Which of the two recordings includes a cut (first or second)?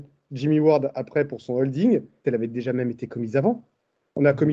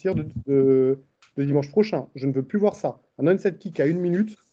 first